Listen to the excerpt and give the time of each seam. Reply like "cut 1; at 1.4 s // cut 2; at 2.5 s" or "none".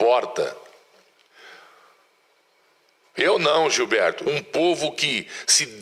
cut 1; at 3.0 s // cut 2; at 4.2 s